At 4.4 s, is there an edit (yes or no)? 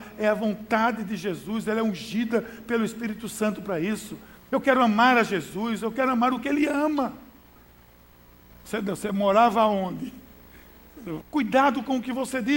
no